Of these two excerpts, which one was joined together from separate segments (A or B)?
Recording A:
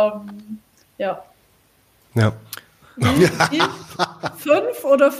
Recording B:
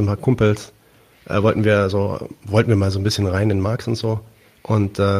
A